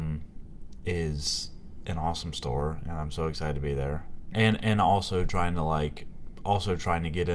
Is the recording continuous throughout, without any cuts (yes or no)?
no